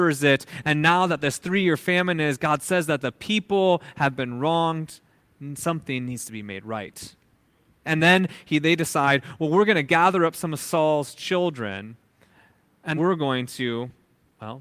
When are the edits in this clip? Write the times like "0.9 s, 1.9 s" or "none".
7.8 s, 13.0 s